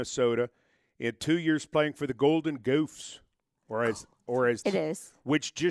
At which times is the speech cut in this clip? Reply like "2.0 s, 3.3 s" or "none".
4.6 s